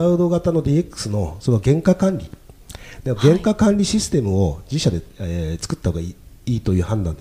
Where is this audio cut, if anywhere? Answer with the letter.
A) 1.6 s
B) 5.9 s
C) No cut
A